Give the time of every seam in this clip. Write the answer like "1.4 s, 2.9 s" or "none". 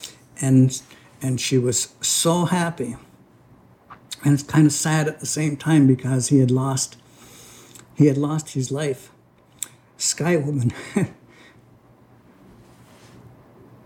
none